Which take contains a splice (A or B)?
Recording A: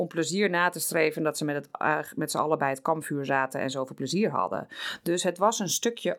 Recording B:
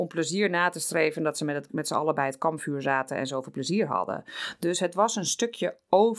B